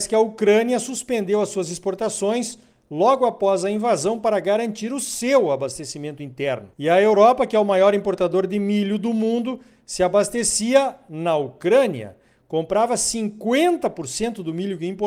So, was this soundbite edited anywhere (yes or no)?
yes